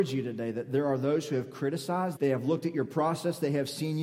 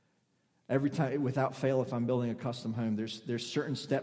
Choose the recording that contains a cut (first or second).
first